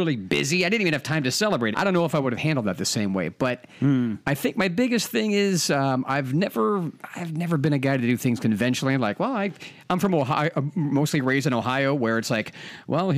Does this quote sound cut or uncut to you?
cut